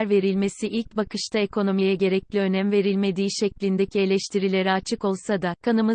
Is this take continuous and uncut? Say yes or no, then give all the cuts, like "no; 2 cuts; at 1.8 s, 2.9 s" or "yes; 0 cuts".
yes; 0 cuts